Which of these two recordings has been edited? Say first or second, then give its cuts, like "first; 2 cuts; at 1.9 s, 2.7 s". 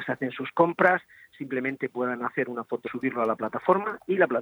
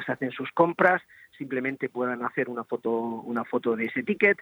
first; 1 cut; at 2.9 s